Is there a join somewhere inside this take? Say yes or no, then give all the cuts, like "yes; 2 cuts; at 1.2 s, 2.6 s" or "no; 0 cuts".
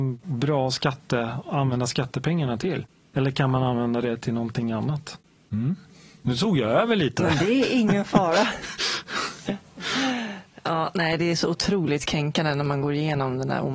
no; 0 cuts